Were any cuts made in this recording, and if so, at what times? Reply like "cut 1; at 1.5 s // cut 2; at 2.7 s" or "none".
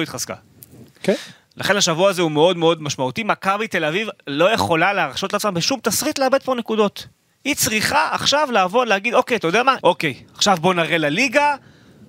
cut 1; at 9.8 s

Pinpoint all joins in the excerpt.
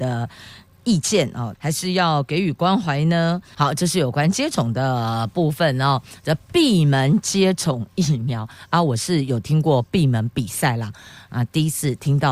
cut 1; at 1.5 s // cut 2; at 3.5 s

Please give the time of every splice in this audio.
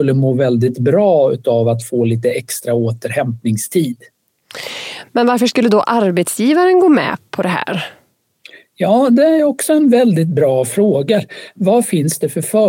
none

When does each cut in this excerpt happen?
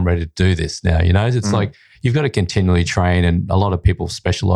none

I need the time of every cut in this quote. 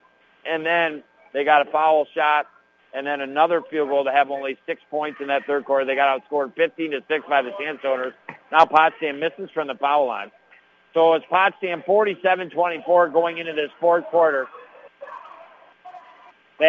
none

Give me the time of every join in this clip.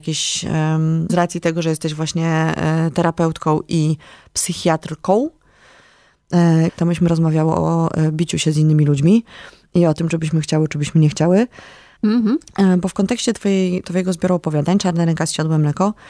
cut 1; at 1.1 s // cut 2; at 6.7 s // cut 3; at 12.0 s

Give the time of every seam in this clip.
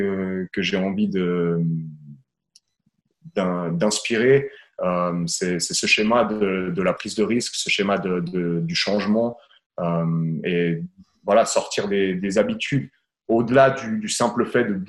none

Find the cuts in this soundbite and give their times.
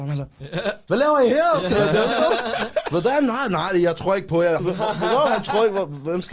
cut 1; at 4.6 s

